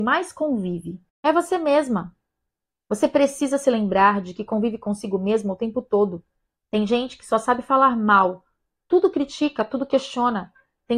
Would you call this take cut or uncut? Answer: cut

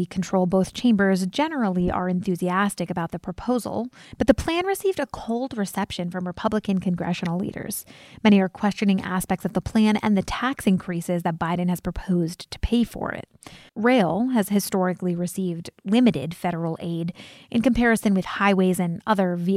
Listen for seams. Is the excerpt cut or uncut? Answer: cut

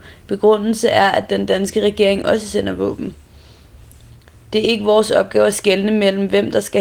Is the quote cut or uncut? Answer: uncut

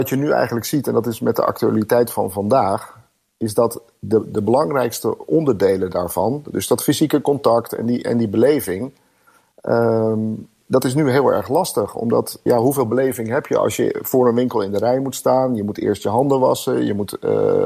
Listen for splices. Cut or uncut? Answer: cut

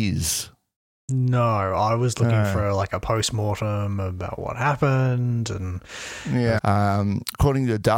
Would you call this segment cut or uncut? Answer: cut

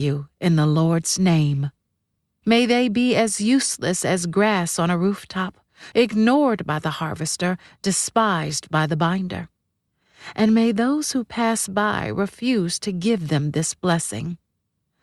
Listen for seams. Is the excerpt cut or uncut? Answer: cut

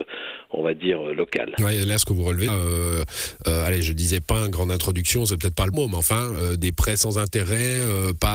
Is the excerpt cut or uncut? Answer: cut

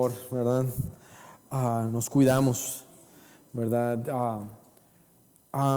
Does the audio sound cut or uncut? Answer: uncut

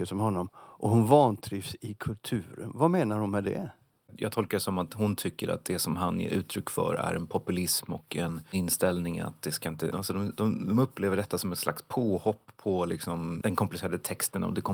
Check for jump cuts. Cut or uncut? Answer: cut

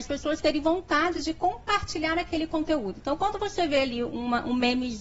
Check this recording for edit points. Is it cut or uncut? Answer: uncut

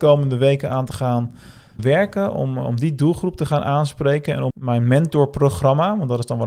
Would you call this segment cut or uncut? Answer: cut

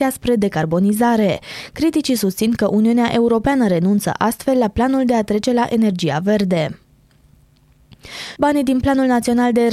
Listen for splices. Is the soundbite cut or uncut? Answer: cut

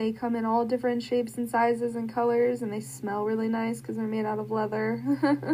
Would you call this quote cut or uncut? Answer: uncut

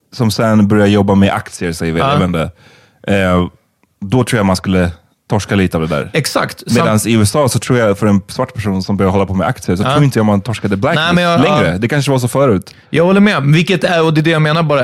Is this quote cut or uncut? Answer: uncut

